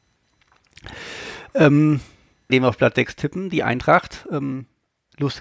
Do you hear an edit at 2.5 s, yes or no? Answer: yes